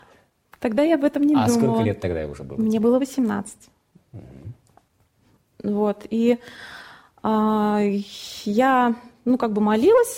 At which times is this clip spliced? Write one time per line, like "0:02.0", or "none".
none